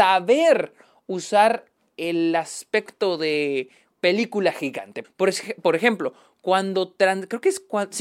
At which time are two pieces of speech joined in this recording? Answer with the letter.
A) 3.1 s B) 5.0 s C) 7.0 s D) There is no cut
B